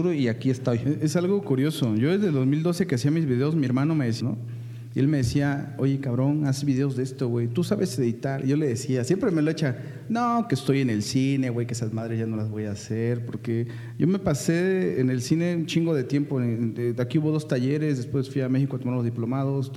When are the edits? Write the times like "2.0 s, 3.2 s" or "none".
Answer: 4.2 s